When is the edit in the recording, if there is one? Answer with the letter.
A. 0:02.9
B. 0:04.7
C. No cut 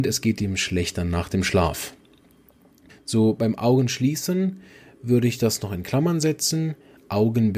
A